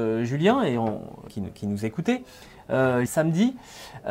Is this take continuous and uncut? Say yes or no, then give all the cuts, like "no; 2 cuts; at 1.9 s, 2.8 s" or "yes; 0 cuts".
no; 2 cuts; at 1.3 s, 3.1 s